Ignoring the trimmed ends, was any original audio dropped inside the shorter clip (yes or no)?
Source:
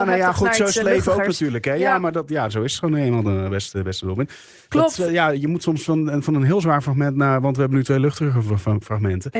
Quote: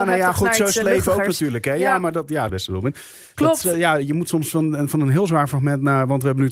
yes